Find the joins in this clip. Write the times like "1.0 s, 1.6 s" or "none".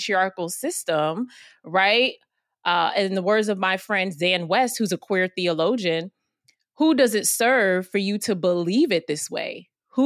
none